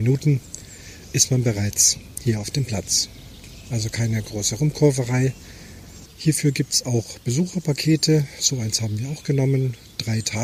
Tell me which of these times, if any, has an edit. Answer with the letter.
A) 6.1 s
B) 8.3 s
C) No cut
A